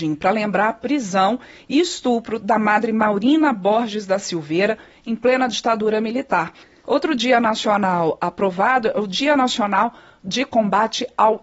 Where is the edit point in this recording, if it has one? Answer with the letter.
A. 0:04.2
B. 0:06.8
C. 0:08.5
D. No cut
B